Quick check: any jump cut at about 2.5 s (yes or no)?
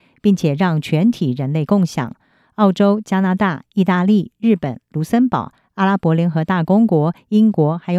no